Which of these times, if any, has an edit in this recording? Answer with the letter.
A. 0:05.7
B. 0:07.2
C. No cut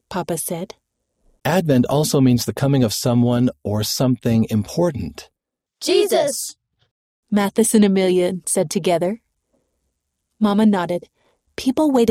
A